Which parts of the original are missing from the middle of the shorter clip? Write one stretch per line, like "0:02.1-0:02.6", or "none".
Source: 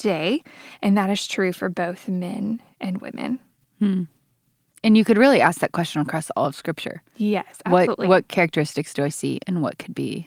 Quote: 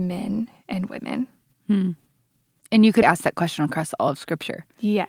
0:05.1-0:05.4